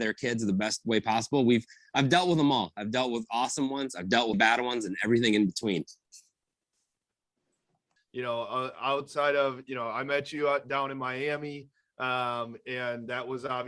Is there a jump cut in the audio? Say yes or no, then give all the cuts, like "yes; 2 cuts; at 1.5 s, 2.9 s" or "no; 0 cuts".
yes; 2 cuts; at 4.3 s, 8.0 s